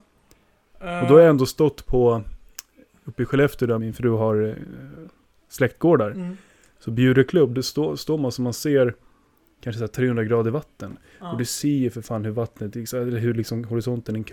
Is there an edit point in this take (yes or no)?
yes